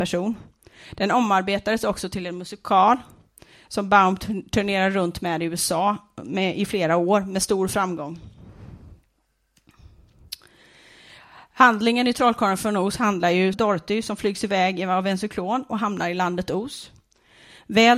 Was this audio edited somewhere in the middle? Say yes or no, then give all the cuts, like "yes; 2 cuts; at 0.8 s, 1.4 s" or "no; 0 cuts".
yes; 1 cut; at 13.5 s